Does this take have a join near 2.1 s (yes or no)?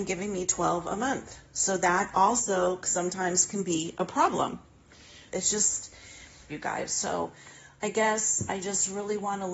no